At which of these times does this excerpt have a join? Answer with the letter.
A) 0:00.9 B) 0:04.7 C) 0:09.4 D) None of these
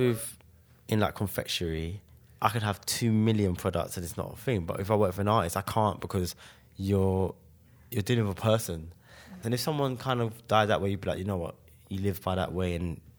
C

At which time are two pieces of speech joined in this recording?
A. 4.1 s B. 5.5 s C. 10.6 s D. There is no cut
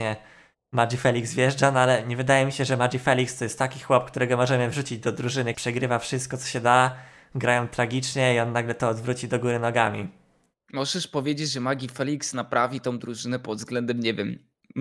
B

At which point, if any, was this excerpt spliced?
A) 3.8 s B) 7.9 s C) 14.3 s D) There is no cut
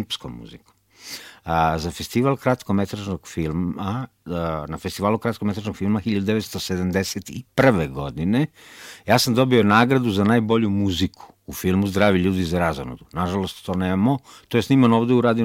D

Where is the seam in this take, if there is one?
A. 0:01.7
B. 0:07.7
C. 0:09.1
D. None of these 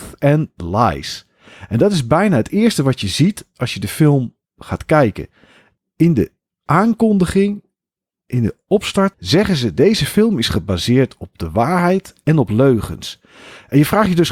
C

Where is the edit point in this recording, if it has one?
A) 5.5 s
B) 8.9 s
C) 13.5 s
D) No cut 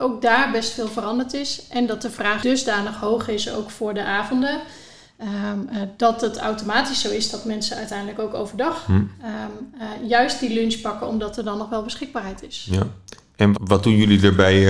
C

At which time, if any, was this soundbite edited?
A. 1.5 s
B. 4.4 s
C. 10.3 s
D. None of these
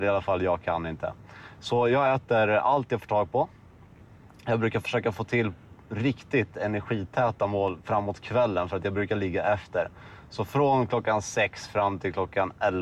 D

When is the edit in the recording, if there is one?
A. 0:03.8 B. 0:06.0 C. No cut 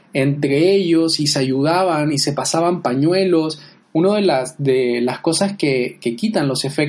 A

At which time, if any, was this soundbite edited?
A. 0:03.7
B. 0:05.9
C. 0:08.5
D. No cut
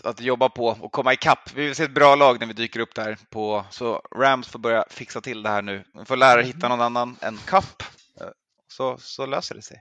A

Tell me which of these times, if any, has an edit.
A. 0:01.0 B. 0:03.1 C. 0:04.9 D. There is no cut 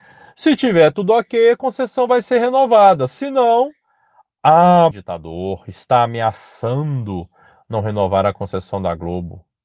C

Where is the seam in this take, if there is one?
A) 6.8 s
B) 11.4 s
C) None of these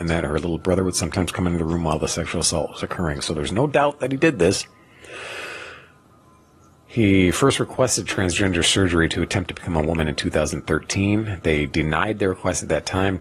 C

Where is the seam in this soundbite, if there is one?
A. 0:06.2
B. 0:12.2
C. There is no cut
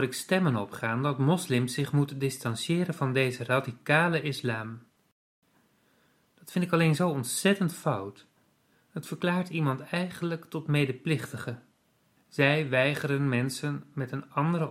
B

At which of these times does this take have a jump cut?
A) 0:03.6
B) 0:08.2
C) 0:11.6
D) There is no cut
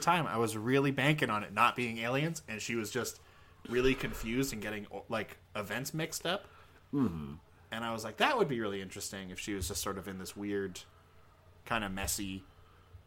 C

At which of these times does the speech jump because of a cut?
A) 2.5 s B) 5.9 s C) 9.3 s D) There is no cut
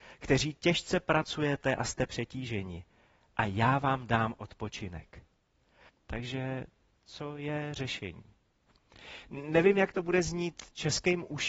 B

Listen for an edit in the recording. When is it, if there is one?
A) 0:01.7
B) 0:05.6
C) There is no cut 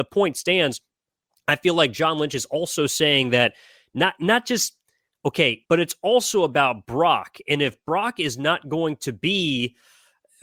B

